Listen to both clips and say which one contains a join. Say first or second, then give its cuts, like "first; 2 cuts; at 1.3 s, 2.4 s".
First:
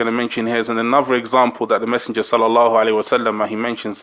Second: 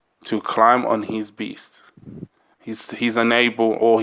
second; 1 cut; at 2.5 s